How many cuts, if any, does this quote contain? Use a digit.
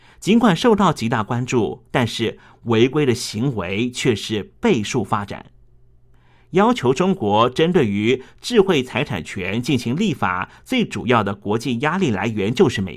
1